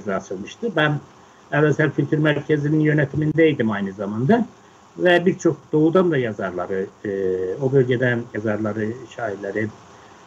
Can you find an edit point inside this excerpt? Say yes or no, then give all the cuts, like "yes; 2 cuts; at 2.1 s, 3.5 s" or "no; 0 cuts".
no; 0 cuts